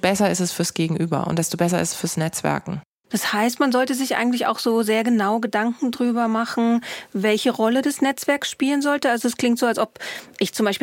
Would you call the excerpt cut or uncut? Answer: uncut